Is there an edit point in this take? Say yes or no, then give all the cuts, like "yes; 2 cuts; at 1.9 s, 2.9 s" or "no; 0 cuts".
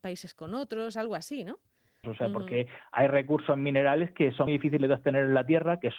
yes; 2 cuts; at 2.0 s, 4.5 s